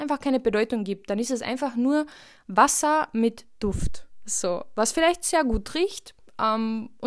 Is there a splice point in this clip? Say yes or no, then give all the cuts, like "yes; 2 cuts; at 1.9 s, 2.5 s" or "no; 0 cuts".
no; 0 cuts